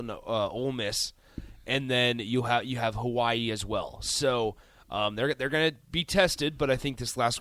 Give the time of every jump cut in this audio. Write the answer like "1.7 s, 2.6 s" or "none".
none